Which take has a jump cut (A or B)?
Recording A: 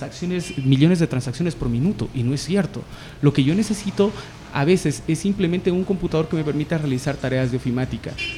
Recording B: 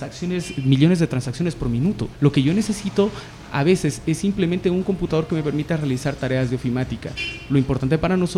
B